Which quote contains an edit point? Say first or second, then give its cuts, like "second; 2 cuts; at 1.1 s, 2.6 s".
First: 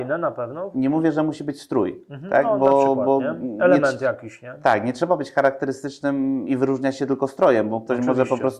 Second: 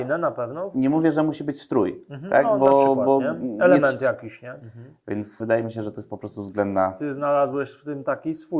second; 1 cut; at 4.6 s